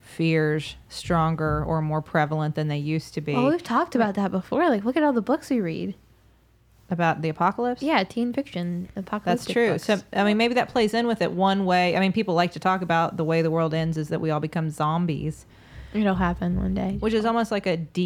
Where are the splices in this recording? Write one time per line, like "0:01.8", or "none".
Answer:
none

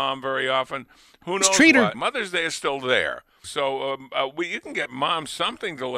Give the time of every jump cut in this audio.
0:01.9
0:03.4

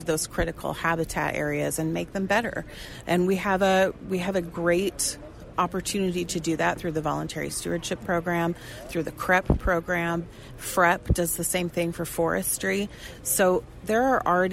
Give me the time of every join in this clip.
0:05.5

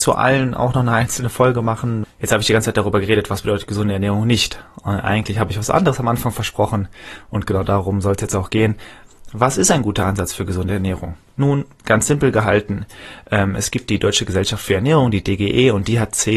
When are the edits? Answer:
0:02.0

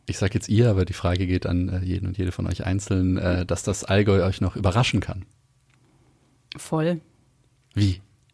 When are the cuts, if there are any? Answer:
none

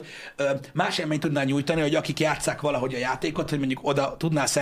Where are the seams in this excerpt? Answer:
none

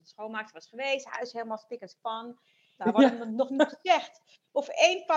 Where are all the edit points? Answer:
0:02.8

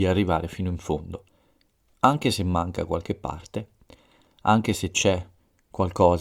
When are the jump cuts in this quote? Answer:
none

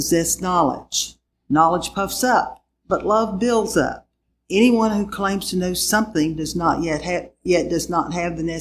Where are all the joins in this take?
none

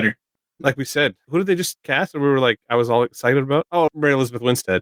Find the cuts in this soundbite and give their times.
0:03.9

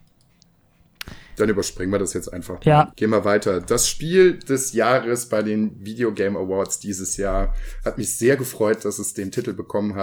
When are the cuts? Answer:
0:02.9

